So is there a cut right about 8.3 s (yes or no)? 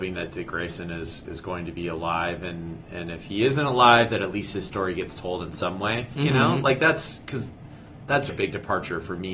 yes